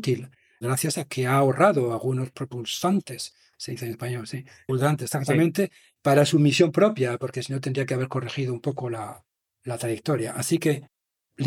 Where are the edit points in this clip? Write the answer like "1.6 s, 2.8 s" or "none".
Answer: 4.7 s